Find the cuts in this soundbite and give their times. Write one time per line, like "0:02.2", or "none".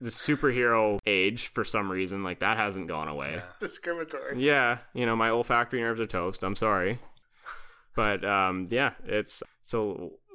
0:03.6
0:09.4

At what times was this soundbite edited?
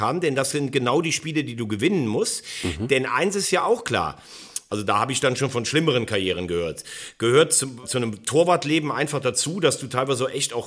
0:04.7
0:07.8

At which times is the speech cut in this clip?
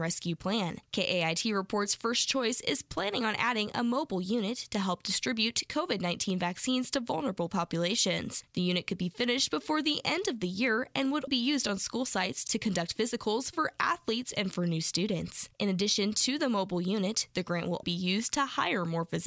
0:11.3
0:17.8

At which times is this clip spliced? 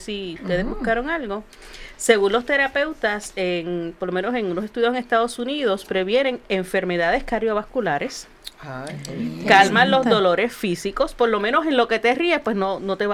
none

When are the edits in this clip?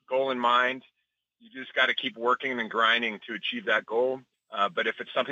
0:04.3

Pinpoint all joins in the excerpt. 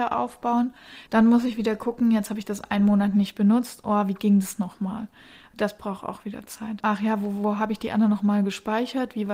0:01.1
0:06.8

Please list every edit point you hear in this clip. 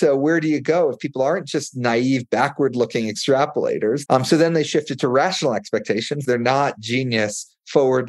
0:04.1
0:06.2

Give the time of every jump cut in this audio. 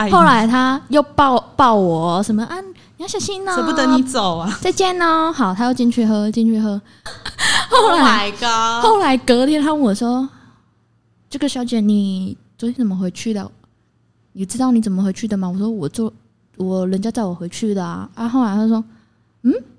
0:07.1

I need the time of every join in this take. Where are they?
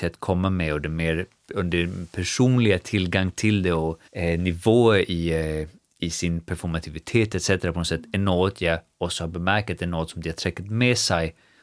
0:04.1

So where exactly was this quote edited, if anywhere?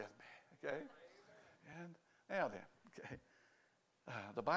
none

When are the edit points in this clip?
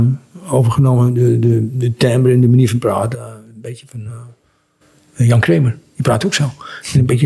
none

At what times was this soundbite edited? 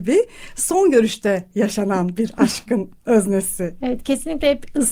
0:03.8

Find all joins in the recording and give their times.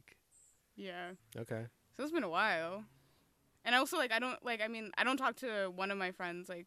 0:01.2

